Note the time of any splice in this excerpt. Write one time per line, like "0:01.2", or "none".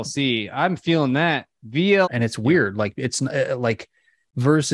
0:02.0